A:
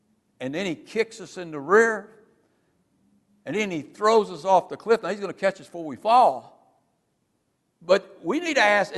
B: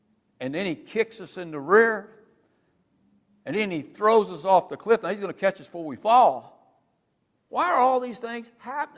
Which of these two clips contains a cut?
B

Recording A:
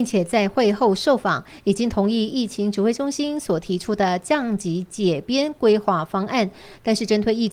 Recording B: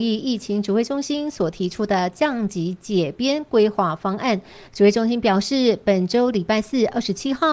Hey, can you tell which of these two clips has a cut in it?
B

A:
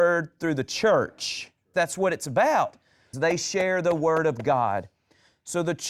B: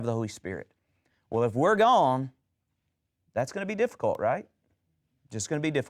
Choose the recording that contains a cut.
A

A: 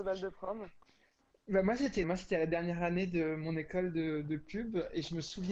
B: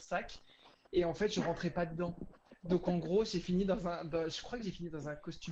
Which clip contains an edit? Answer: A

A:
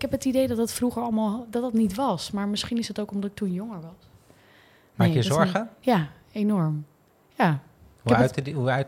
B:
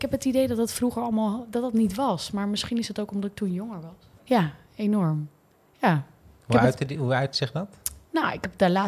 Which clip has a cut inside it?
B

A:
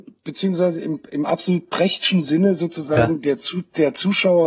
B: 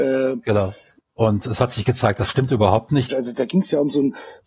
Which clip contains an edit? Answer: B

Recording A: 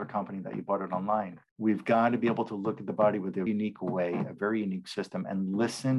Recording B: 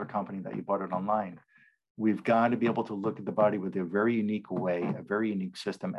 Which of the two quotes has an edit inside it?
A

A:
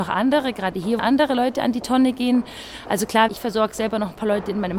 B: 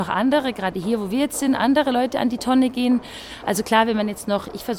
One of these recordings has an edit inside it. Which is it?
A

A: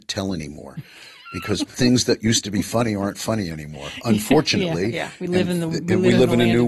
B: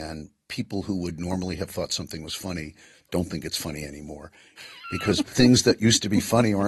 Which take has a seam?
B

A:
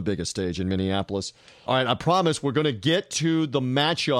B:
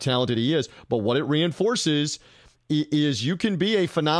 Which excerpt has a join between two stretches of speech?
A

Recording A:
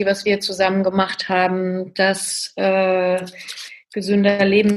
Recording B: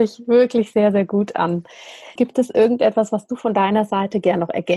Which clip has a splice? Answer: B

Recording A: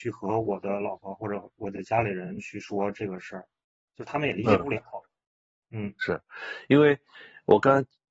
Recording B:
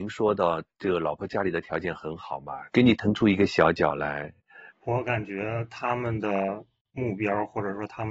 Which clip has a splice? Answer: B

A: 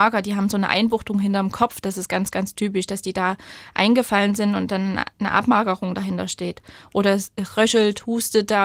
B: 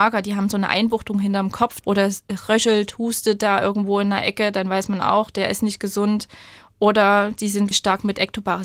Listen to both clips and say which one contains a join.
B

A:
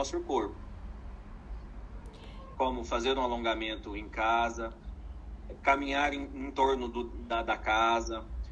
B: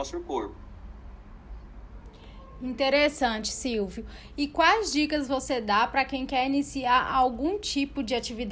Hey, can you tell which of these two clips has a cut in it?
A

